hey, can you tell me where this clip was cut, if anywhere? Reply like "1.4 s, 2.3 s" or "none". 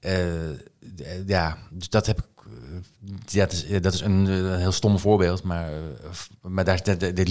none